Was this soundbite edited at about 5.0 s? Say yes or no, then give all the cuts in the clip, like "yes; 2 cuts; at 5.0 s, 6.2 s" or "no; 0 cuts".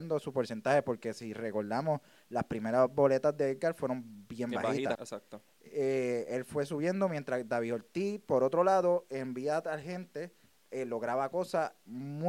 yes; 1 cut; at 5.0 s